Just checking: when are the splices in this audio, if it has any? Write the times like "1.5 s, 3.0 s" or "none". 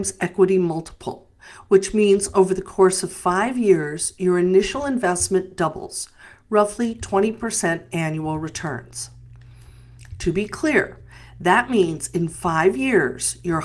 none